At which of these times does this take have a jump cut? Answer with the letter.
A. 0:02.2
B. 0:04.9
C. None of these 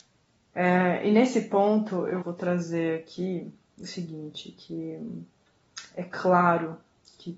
A